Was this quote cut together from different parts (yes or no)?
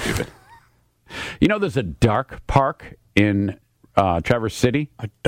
no